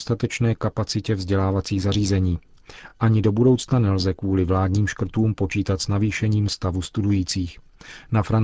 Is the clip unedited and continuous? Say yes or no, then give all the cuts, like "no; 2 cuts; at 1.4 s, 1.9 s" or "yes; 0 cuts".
yes; 0 cuts